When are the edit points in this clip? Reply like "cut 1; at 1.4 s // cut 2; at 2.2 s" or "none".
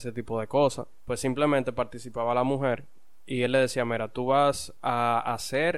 cut 1; at 1.1 s